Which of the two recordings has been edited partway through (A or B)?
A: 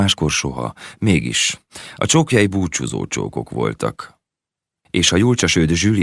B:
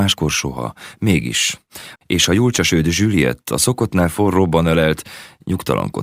B